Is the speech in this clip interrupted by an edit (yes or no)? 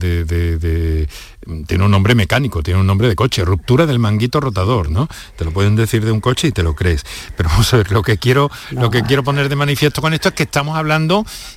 no